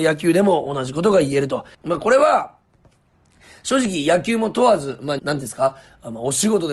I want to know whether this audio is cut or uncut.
cut